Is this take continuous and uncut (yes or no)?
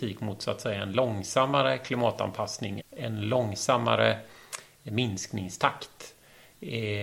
no